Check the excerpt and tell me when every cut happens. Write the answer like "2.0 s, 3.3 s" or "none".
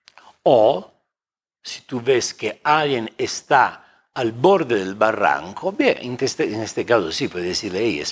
none